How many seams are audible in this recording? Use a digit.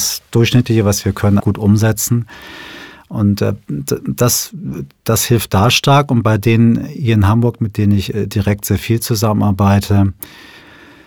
1